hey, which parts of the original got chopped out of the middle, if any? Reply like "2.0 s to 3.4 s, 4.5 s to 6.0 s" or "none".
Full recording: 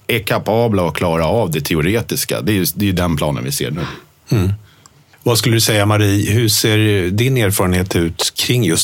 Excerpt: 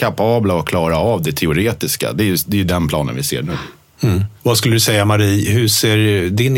4.6 s to 5.2 s